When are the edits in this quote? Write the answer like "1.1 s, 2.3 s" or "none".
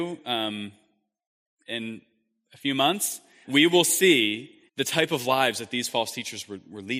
3.4 s, 4.7 s

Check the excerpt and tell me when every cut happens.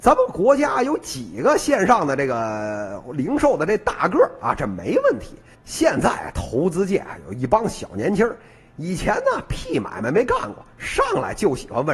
5.5 s

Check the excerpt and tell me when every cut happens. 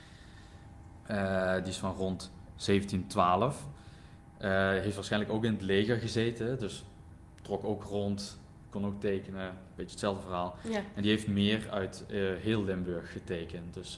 1.0 s

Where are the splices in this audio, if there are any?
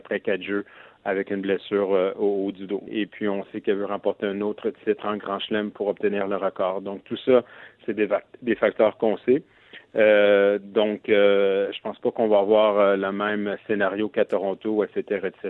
2.9 s

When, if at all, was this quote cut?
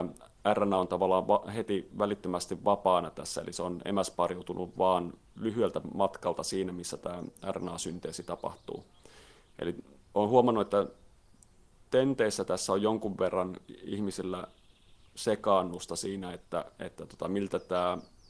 none

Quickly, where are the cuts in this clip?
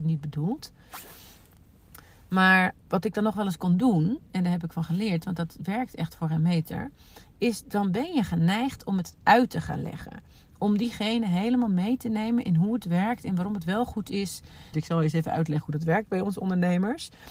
2.8 s, 14.7 s

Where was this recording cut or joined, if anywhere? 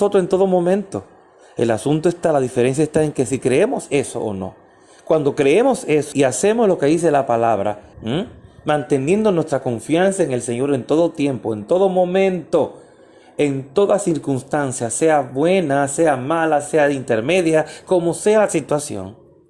6.1 s, 7.9 s

